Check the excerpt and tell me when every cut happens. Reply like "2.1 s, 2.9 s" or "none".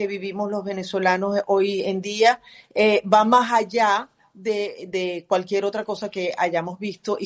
none